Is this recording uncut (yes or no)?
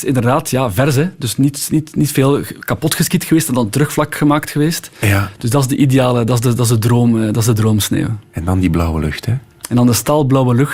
yes